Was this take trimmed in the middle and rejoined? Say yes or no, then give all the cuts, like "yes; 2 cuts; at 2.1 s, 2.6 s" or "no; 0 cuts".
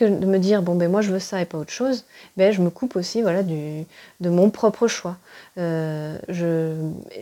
yes; 1 cut; at 6.3 s